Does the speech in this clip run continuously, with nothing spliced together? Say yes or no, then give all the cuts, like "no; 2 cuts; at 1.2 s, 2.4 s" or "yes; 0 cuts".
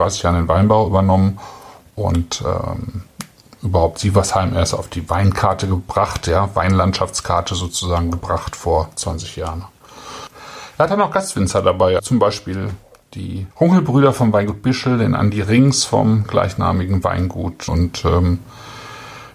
no; 3 cuts; at 12.0 s, 13.5 s, 17.7 s